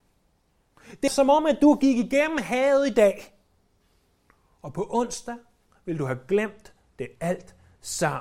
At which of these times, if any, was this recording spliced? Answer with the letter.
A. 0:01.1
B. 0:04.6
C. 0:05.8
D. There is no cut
A